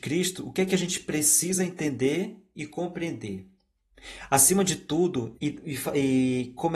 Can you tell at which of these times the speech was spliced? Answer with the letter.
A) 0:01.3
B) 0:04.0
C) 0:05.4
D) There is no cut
C